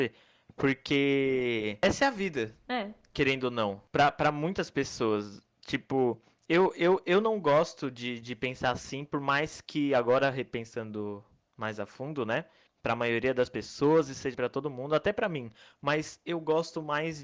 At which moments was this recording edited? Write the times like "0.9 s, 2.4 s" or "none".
12.7 s, 14.3 s